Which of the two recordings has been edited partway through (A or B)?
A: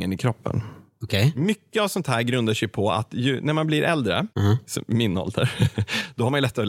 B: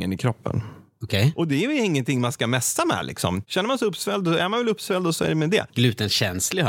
B